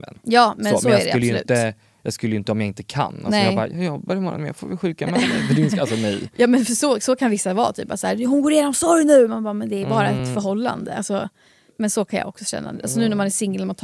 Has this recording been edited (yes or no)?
no